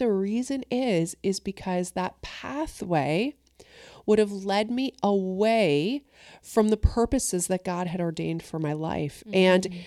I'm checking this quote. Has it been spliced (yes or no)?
no